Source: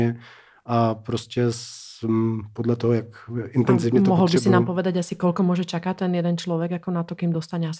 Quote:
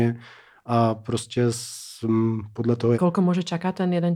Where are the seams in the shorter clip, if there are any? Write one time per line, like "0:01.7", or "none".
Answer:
0:02.9